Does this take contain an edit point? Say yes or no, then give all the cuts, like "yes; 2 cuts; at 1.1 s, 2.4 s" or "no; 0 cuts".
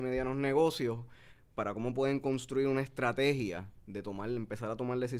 yes; 1 cut; at 1.5 s